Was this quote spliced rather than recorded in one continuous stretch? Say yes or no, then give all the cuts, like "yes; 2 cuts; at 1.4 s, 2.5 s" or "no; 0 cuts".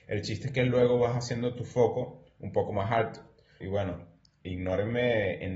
yes; 1 cut; at 3.6 s